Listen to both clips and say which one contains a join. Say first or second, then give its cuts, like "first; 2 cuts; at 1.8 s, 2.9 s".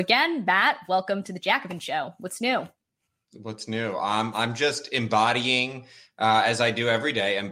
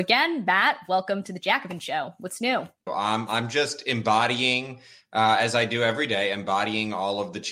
second; 1 cut; at 2.9 s